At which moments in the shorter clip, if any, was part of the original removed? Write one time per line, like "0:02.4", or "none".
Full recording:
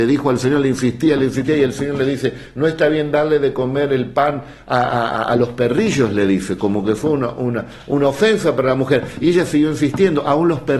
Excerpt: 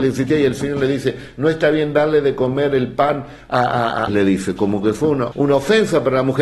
0:04.1
0:05.3